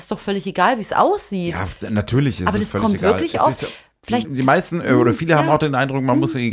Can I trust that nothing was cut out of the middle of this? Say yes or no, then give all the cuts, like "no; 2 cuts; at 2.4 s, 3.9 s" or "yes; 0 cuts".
no; 1 cut; at 4.2 s